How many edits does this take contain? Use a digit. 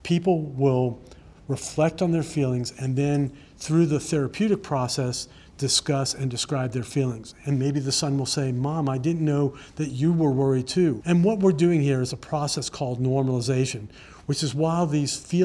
1